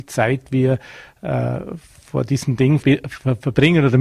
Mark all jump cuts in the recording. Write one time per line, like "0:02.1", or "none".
0:02.8